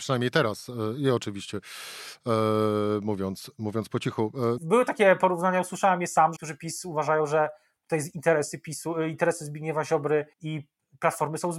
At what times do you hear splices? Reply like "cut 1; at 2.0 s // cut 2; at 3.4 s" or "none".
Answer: cut 1; at 4.6 s // cut 2; at 6.4 s // cut 3; at 10.3 s

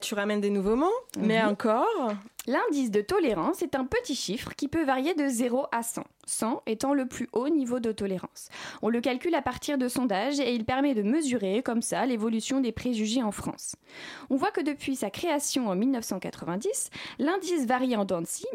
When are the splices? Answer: cut 1; at 2.5 s

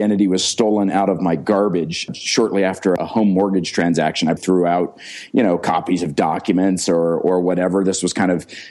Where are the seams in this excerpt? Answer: cut 1; at 4.4 s

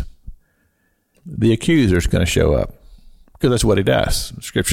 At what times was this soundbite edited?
cut 1; at 1.1 s

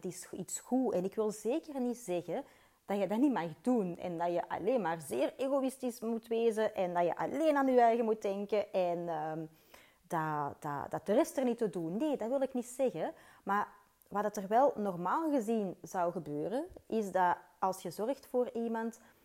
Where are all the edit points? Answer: none

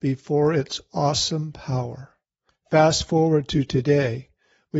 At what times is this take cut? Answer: cut 1; at 2.5 s

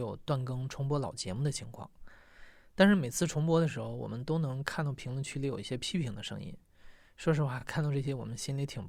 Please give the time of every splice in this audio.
none

